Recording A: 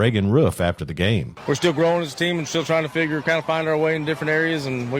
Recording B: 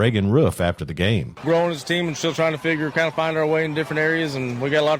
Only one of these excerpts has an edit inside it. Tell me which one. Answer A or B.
B